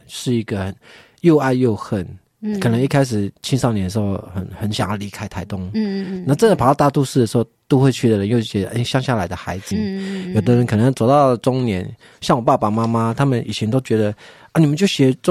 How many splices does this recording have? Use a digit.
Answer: 1